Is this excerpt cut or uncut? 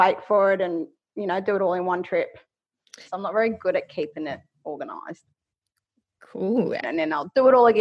cut